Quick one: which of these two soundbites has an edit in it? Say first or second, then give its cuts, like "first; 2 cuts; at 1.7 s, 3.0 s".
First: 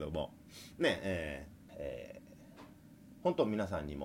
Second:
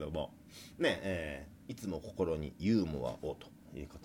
first; 1 cut; at 1.7 s